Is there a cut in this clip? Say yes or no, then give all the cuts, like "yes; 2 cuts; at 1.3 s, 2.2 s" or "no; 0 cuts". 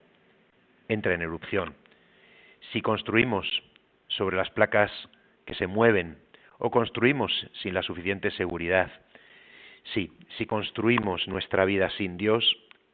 no; 0 cuts